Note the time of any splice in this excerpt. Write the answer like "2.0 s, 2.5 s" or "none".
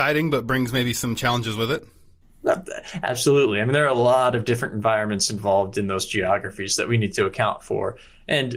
none